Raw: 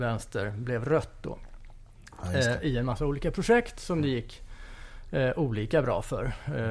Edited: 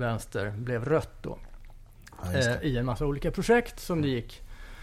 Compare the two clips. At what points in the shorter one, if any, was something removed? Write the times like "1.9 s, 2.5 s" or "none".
none